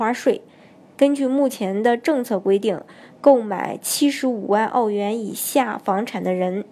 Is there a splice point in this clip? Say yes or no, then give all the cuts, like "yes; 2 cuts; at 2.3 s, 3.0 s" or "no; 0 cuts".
yes; 1 cut; at 0.9 s